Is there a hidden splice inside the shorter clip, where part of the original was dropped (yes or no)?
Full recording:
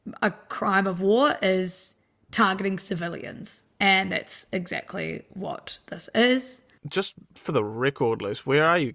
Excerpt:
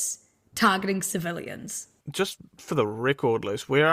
yes